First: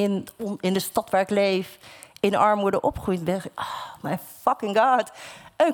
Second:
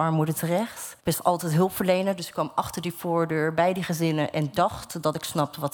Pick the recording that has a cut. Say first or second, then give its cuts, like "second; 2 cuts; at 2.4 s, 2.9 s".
second; 1 cut; at 1.0 s